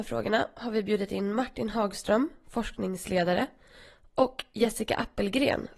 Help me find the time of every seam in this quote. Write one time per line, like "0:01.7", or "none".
none